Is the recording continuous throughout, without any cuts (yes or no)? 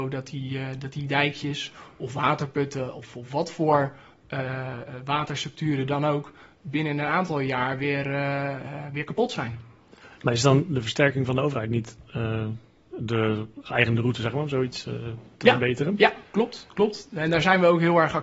yes